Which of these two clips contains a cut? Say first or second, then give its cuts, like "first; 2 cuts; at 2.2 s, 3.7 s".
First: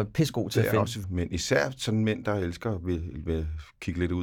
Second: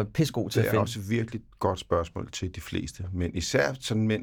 first; 1 cut; at 1.0 s